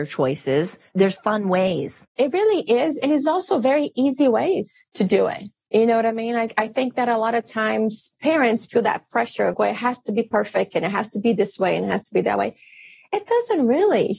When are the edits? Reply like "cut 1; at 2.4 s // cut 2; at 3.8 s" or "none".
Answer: cut 1; at 9.5 s